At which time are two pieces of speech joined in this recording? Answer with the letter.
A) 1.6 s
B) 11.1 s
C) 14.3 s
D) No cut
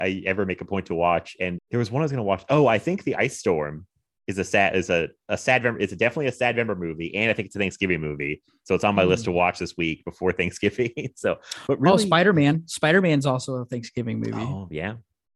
A